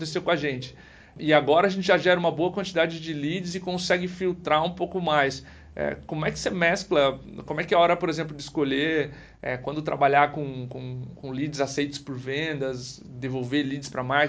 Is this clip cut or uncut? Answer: uncut